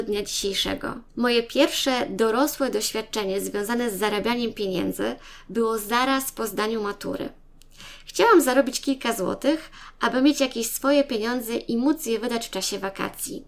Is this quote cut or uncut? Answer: cut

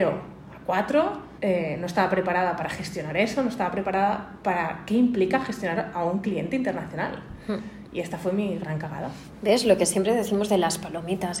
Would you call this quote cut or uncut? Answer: cut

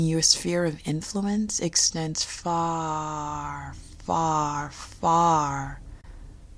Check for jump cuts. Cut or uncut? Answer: uncut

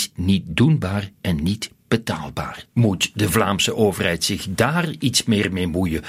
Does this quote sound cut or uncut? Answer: cut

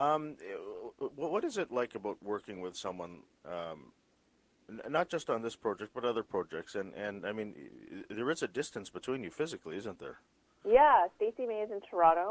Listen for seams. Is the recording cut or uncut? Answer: uncut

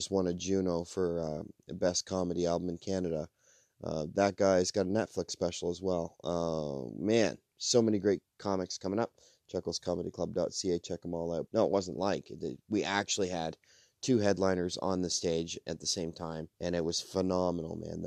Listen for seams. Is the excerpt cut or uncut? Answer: cut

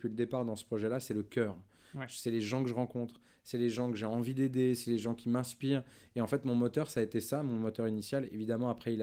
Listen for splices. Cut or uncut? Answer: uncut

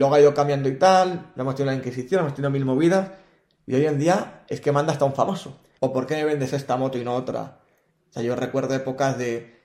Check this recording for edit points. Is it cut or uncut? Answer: cut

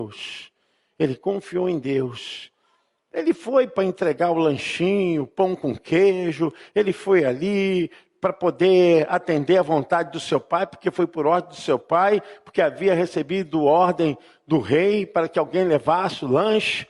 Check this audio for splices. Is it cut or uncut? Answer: uncut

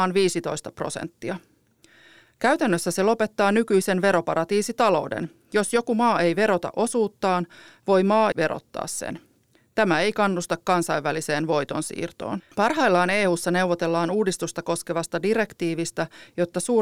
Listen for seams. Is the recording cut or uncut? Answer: cut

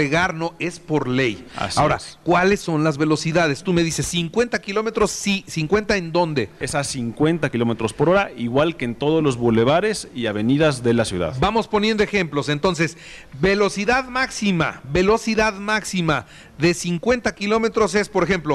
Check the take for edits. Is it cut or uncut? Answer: cut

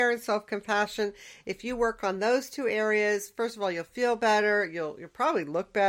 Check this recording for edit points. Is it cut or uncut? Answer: uncut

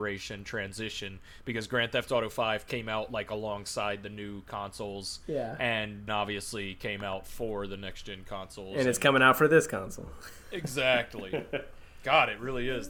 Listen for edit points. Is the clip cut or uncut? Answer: cut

